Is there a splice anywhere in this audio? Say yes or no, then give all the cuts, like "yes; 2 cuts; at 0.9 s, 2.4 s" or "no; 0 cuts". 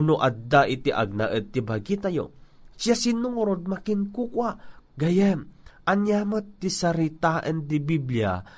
yes; 2 cuts; at 2.7 s, 4.8 s